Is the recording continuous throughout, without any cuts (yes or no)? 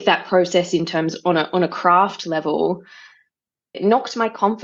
no